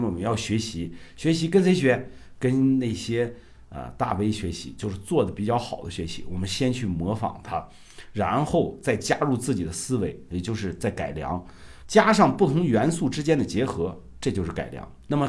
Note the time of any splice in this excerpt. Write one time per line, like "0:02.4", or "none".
0:10.3
0:11.8